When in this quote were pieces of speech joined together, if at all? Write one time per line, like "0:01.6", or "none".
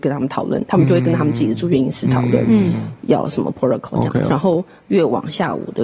0:04.3